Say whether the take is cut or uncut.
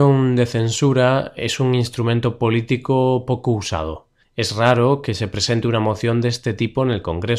uncut